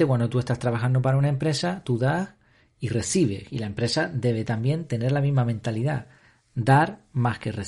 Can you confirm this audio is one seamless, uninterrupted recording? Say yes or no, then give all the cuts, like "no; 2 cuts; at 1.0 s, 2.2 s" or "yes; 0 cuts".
yes; 0 cuts